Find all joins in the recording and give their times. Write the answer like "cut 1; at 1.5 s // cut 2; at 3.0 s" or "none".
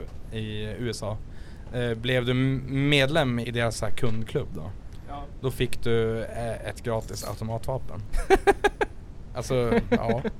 cut 1; at 3.4 s